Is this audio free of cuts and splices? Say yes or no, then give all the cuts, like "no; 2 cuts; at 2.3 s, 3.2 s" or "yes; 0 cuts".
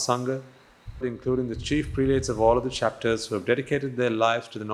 no; 1 cut; at 1.0 s